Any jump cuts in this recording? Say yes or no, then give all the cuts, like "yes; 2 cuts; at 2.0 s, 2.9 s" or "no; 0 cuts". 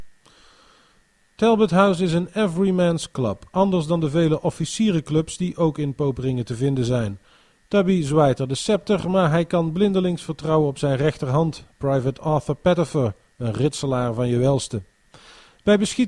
no; 0 cuts